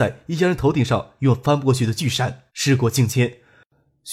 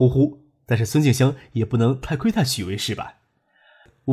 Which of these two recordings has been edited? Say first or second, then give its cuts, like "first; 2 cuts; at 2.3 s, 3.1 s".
first; 1 cut; at 2.5 s